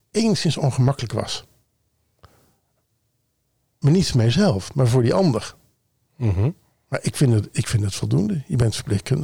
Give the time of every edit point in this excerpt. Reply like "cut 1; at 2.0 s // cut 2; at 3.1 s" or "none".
none